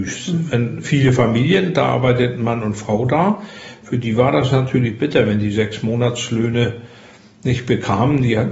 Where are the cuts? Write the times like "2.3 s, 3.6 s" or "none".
none